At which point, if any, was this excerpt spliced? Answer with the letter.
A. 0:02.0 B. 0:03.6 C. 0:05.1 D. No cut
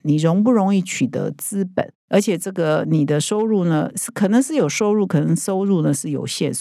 A